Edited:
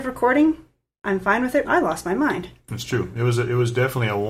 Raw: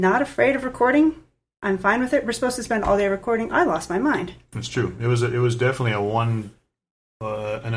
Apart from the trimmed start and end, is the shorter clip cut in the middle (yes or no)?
yes